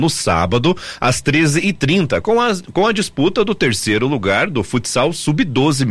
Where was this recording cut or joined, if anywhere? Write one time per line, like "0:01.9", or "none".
none